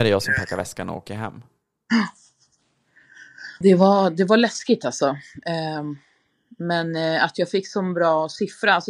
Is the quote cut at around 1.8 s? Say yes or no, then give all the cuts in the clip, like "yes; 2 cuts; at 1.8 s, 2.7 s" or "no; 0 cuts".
no; 1 cut; at 3.6 s